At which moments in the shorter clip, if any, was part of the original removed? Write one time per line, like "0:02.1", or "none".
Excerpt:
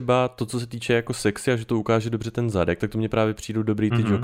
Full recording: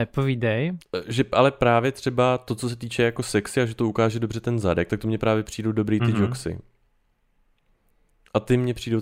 none

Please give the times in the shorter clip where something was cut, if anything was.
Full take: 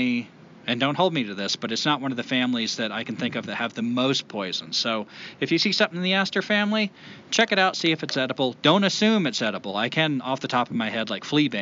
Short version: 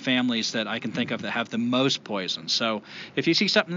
none

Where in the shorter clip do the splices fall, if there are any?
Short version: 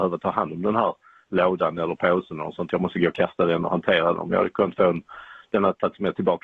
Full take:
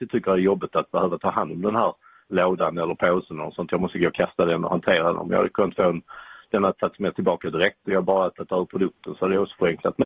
none

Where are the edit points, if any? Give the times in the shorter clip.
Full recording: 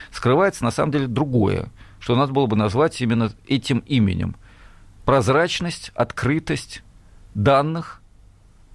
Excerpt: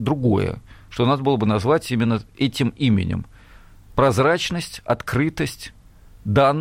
none

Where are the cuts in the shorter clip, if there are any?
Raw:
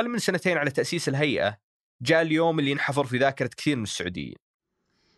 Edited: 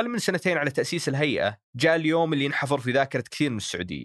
0:01.6

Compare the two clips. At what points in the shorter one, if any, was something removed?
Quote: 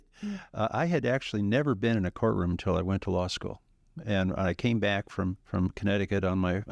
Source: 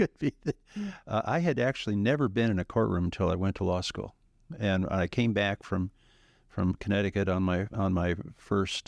0:05.4

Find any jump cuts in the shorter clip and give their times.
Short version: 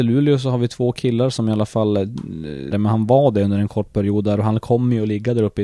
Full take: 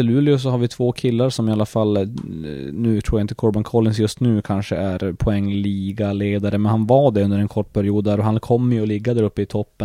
0:02.7

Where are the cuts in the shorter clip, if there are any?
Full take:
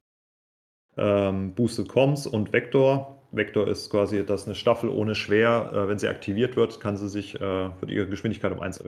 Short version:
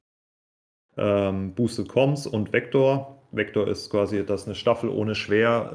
none

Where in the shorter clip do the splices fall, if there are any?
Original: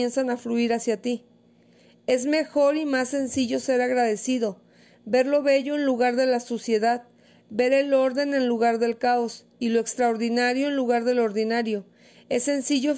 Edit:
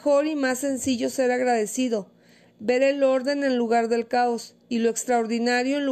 0:02.5

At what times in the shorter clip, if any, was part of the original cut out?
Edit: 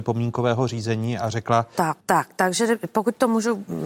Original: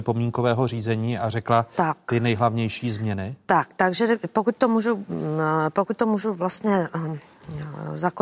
0:02.0

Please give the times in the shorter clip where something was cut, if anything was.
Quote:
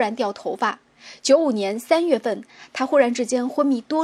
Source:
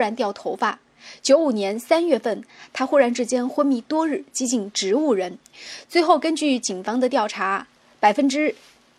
none

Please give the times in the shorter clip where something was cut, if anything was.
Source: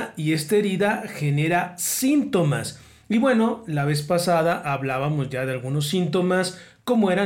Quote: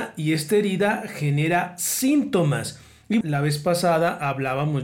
0:03.2

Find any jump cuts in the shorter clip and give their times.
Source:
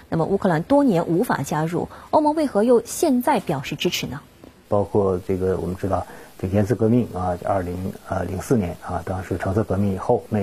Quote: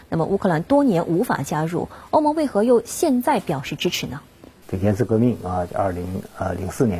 0:04.6

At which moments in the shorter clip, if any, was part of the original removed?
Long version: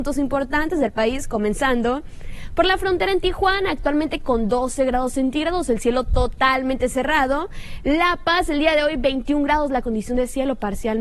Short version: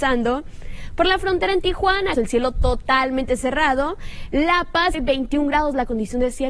0:02.1
0:04.9

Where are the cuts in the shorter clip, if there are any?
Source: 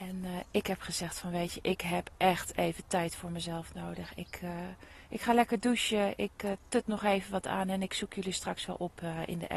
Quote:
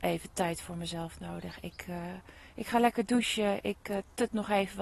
none

